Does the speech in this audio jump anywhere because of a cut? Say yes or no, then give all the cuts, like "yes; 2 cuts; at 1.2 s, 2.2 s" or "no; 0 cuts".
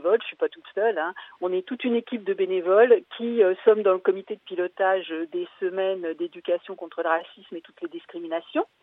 no; 0 cuts